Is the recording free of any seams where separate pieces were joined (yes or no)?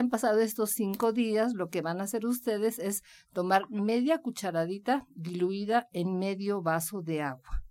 yes